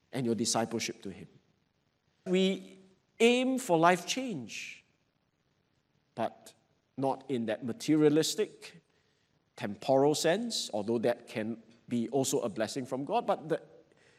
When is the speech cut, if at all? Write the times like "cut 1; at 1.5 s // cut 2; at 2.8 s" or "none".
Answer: cut 1; at 2.3 s